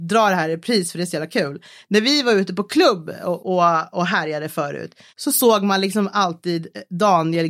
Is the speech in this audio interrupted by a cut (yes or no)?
yes